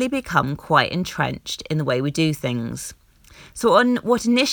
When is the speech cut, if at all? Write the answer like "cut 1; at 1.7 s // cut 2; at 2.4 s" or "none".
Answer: none